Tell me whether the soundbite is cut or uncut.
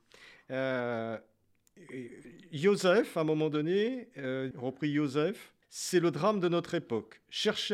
cut